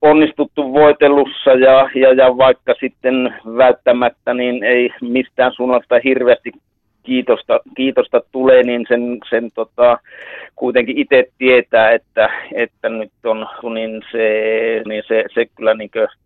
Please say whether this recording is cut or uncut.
cut